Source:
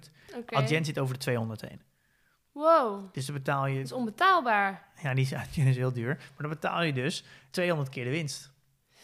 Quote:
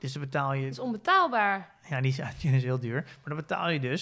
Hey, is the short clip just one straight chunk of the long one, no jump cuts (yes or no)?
yes